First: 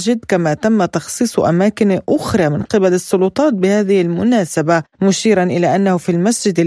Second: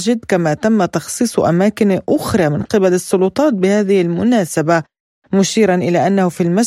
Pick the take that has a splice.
first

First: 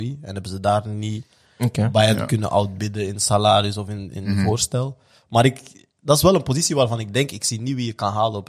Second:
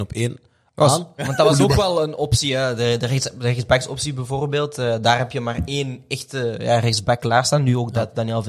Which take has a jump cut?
second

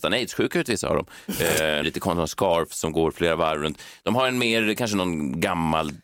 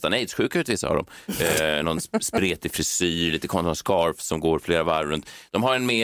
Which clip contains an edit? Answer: first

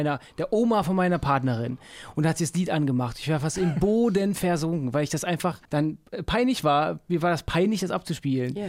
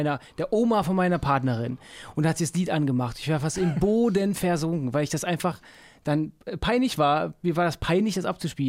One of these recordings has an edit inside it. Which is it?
first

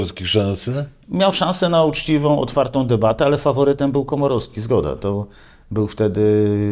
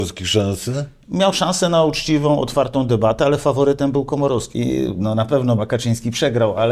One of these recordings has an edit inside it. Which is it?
second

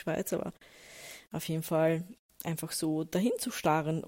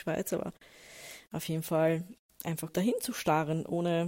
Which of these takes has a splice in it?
second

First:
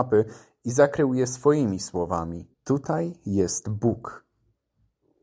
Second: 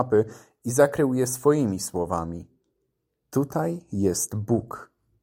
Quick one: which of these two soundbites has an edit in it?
first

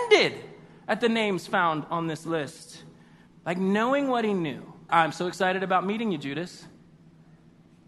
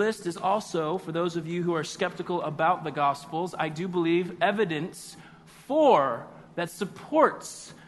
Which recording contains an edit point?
first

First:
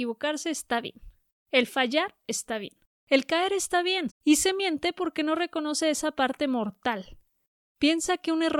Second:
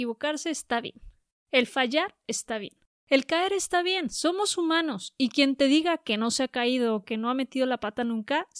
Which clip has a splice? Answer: first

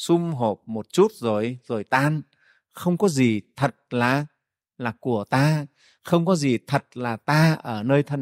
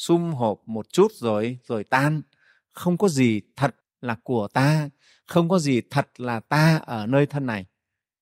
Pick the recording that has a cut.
second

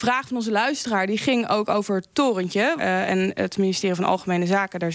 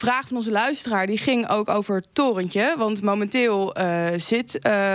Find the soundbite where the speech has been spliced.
first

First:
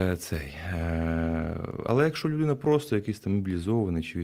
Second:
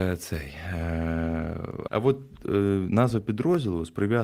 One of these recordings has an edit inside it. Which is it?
second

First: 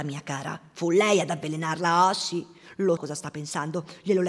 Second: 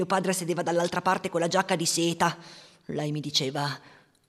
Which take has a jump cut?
first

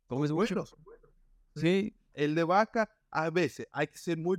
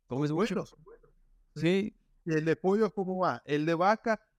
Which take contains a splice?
first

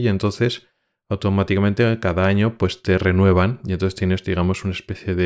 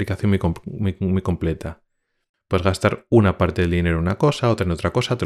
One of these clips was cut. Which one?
second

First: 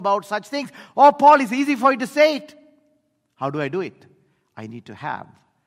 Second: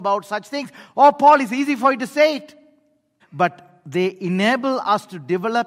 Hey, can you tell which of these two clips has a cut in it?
second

